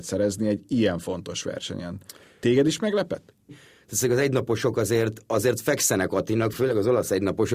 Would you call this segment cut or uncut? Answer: cut